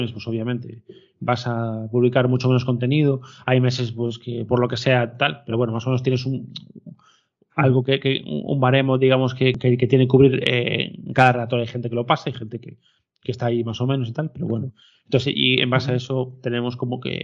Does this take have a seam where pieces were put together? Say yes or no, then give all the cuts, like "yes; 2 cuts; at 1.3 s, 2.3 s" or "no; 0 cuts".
no; 0 cuts